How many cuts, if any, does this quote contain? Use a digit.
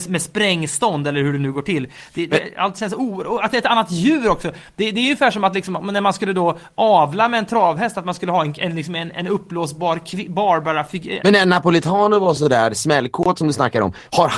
1